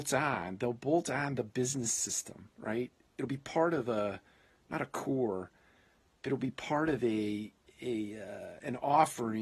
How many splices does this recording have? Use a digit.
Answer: 1